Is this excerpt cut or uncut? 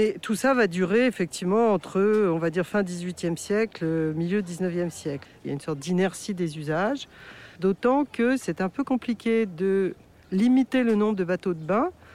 cut